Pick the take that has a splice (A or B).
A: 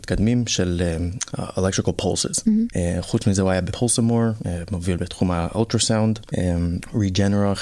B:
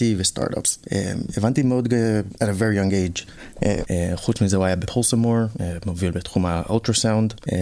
B